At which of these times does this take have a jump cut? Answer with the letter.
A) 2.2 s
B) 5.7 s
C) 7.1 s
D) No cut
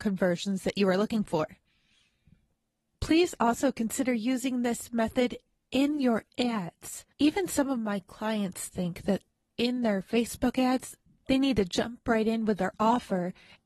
C